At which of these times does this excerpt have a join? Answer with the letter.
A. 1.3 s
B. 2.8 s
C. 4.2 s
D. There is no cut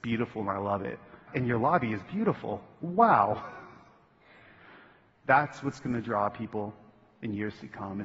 A